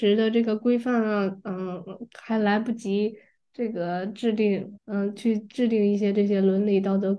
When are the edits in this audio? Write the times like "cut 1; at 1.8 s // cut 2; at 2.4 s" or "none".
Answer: cut 1; at 4.8 s